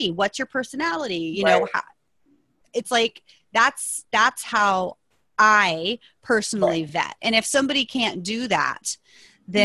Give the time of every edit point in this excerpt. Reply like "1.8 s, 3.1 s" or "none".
none